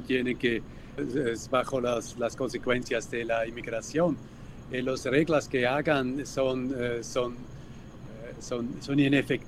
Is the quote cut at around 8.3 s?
no; 1 cut; at 1.0 s

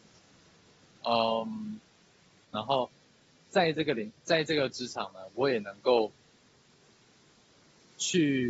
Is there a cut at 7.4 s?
no; 1 cut; at 2.4 s

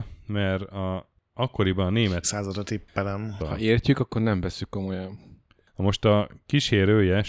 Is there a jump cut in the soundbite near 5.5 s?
no; 2 cuts; at 2.2 s, 3.4 s

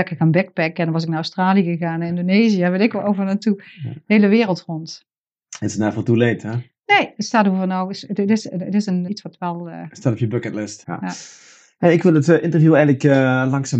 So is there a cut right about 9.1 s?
yes; 2 cuts; at 9.1 s, 10.8 s

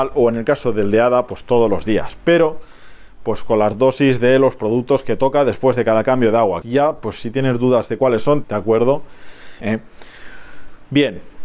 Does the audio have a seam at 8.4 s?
yes; 3 cuts; at 6.6 s, 8.4 s, 9.6 s

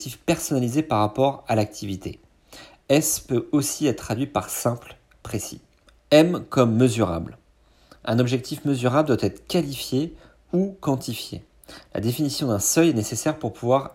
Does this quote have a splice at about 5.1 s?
yes; 1 cut; at 5.1 s

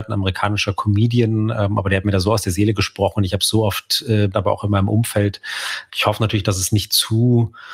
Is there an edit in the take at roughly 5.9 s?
yes; 2 cuts; at 4.3 s, 5.9 s

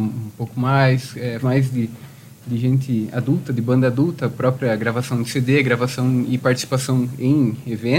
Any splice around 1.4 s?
yes; 1 cut; at 1.4 s

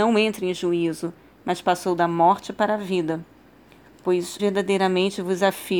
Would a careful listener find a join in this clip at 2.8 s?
no; 1 cut; at 4.4 s

